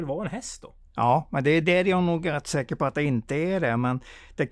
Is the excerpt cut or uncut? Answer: cut